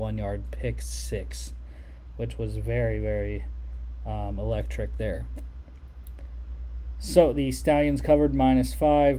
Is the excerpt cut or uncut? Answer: uncut